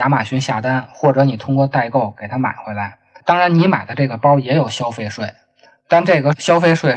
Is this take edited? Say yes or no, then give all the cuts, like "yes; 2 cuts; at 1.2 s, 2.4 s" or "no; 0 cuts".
no; 0 cuts